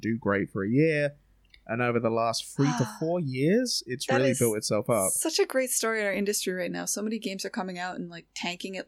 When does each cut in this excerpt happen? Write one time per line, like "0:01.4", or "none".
none